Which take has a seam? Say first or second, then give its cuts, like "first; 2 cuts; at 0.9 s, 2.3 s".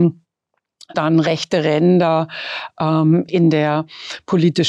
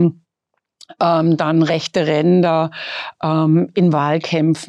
first; 2 cuts; at 0.9 s, 3.3 s